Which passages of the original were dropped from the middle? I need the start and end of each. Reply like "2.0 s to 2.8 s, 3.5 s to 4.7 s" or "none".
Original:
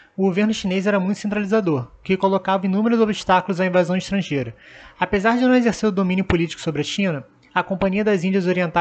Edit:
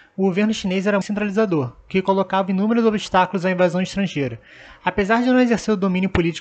1.0 s to 1.2 s